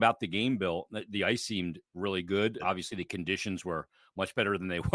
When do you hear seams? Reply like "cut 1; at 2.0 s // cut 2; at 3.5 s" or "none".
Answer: cut 1; at 2.6 s